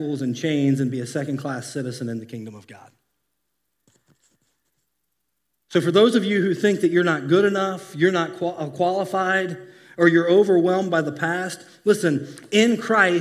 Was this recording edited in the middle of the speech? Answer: no; 0 cuts

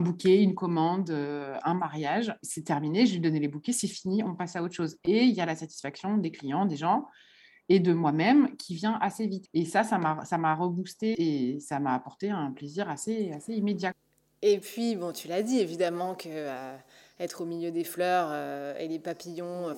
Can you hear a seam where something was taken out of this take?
no; 0 cuts

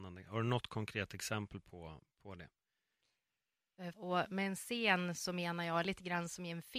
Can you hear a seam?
yes; 1 cut; at 3.9 s

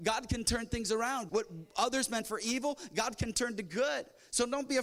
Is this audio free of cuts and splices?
no; 1 cut; at 1.3 s

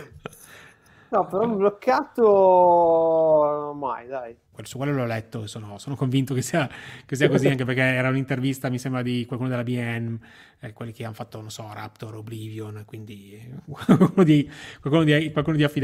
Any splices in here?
yes; 1 cut; at 4.5 s

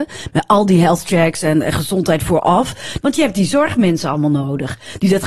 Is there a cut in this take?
yes; 1 cut; at 3.0 s

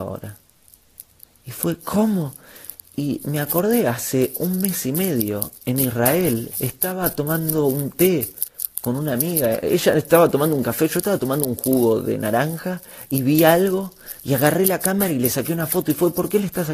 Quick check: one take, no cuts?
no; 1 cut; at 6.5 s

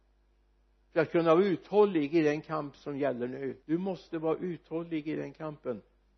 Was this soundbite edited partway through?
yes; 1 cut; at 3.6 s

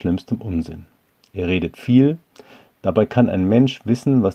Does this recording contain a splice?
no; 0 cuts

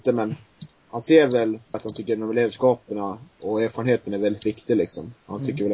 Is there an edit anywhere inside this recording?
yes; 1 cut; at 1.7 s

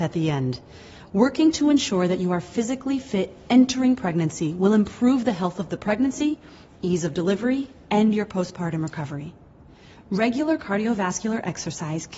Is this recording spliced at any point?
no; 0 cuts

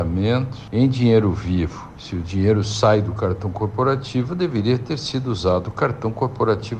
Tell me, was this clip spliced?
no; 0 cuts

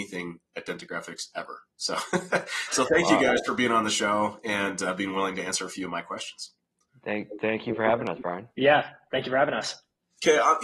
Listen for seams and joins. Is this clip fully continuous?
yes; 0 cuts

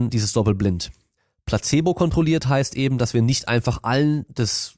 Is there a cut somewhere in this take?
no; 0 cuts

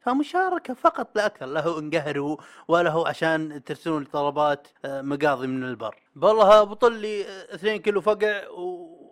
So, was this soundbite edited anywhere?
yes; 2 cuts; at 4.8 s, 6.1 s

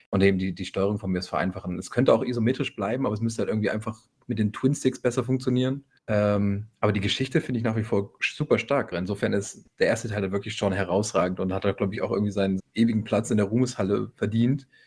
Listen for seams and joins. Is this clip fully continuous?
no; 3 cuts; at 6.0 s, 8.9 s, 12.6 s

